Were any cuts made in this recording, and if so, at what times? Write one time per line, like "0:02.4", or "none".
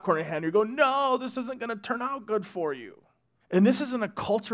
0:03.4